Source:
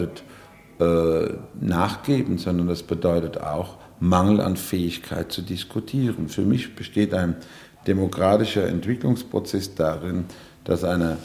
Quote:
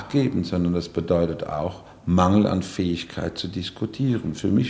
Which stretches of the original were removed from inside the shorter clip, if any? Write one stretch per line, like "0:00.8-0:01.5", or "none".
none